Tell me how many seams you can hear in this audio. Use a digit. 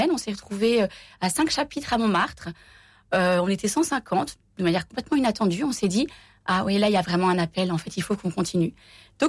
0